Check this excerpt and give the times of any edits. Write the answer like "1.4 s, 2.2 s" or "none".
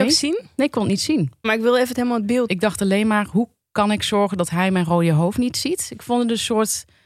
1.4 s, 2.5 s